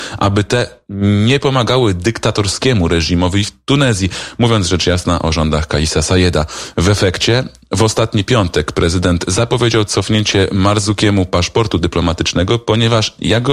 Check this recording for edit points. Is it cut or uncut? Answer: uncut